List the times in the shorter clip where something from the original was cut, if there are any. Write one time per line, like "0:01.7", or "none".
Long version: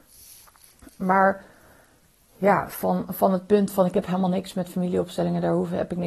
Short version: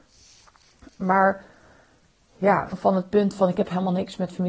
0:02.7